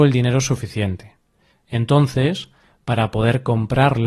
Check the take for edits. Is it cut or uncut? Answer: uncut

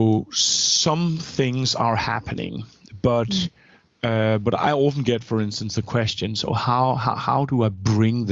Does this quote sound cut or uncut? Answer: uncut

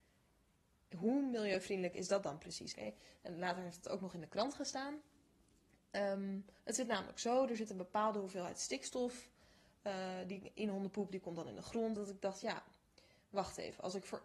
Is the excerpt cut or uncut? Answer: cut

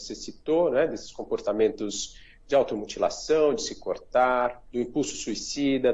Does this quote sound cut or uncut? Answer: cut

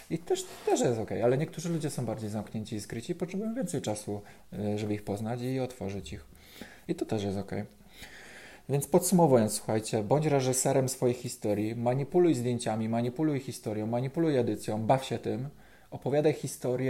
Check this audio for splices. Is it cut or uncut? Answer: uncut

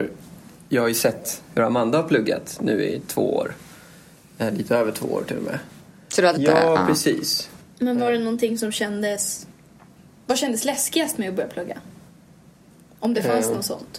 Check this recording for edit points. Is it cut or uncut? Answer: cut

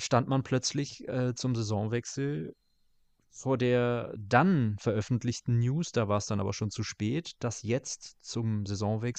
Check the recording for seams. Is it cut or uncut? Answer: uncut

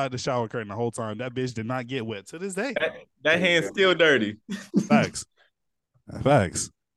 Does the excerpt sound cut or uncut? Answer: uncut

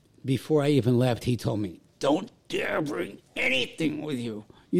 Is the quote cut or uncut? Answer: uncut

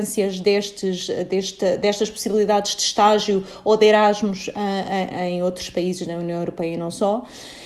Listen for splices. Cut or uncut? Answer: cut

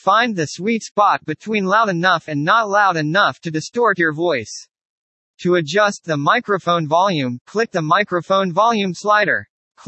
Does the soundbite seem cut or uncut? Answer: uncut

